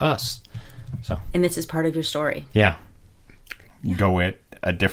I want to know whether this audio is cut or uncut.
cut